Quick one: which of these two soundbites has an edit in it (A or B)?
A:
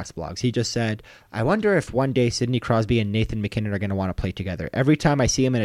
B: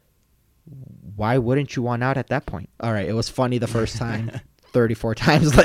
B